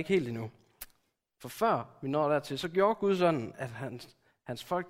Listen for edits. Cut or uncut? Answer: uncut